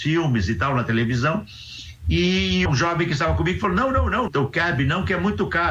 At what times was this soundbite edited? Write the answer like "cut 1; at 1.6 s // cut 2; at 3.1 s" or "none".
cut 1; at 2.7 s // cut 2; at 4.3 s